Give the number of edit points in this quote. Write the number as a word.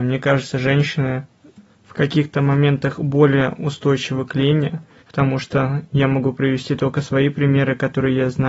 one